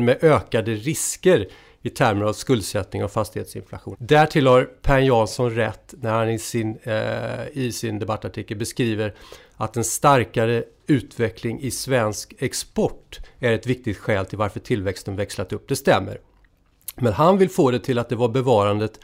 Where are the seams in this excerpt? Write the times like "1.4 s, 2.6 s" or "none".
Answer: 3.9 s